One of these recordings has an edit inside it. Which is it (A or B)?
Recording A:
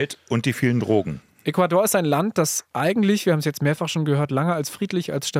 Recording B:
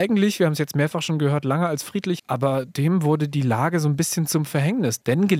B